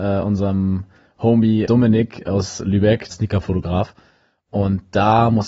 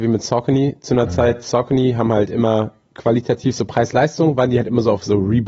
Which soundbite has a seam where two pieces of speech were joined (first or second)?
first